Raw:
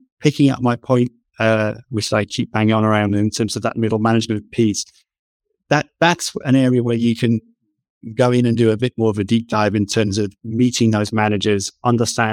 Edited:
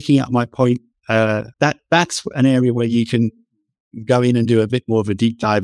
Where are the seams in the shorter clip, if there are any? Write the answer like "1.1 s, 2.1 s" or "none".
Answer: 1.5 s